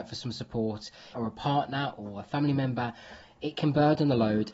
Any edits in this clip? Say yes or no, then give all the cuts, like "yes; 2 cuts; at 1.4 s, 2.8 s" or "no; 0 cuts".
yes; 1 cut; at 1.1 s